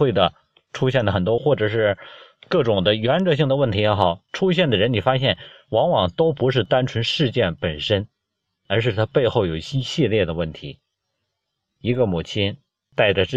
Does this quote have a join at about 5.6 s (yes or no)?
no